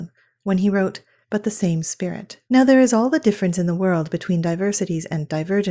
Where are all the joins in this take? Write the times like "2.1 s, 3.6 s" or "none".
1.2 s, 2.4 s